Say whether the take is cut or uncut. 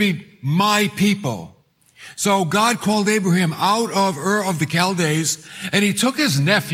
uncut